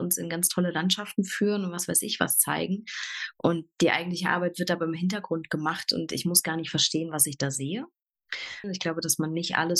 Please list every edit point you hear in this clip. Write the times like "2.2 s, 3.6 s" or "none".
8.6 s